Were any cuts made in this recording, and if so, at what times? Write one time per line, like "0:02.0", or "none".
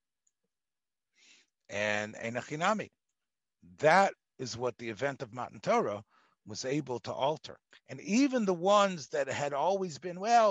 0:07.7